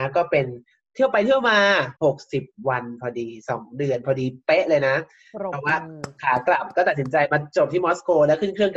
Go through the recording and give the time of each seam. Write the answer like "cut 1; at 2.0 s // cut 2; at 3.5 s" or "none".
cut 1; at 2.0 s